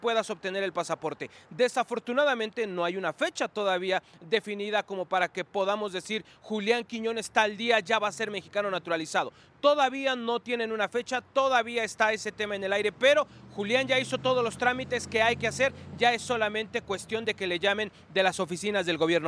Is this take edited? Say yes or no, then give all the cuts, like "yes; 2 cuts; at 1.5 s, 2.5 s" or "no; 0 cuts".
no; 0 cuts